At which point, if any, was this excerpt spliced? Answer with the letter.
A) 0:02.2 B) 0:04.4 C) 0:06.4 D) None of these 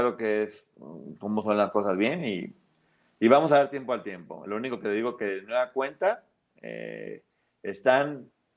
D